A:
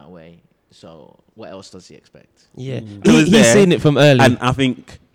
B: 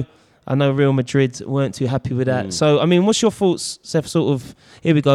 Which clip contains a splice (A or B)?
A